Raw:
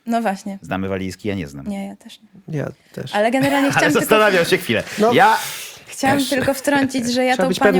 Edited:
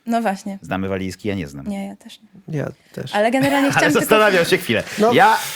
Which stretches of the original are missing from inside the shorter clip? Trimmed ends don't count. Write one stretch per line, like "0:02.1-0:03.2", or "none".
none